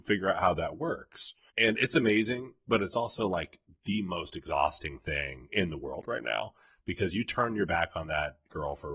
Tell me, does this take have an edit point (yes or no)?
yes